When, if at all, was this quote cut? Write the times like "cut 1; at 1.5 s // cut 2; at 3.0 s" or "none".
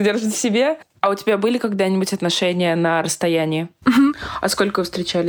none